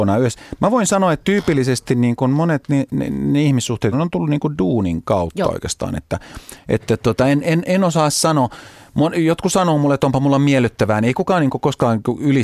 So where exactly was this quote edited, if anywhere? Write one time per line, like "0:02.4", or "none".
0:03.9